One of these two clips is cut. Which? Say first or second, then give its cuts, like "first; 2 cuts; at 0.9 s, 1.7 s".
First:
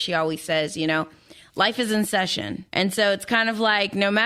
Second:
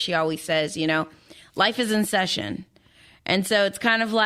first; 1 cut; at 2.7 s